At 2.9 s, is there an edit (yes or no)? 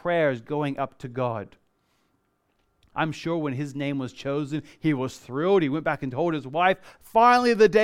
yes